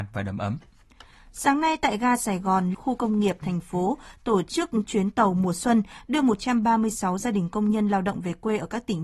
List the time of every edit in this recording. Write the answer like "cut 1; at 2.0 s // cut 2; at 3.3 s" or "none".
cut 1; at 2.7 s